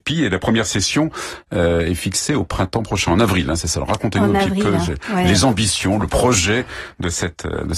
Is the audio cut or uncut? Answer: uncut